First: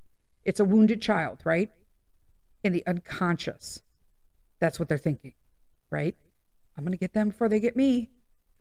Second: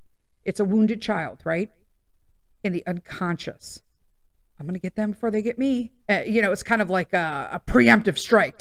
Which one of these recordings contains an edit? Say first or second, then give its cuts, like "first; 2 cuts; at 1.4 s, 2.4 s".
second; 2 cuts; at 4.5 s, 6.1 s